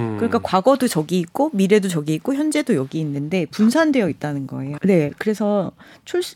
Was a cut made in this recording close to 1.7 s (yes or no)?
no